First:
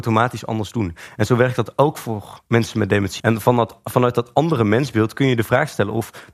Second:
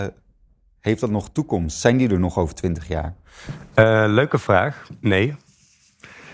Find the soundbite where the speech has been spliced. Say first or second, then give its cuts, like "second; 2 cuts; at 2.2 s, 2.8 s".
first; 1 cut; at 3.2 s